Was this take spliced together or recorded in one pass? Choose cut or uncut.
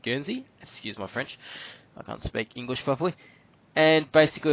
uncut